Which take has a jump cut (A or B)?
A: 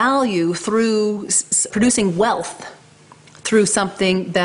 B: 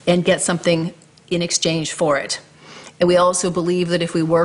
A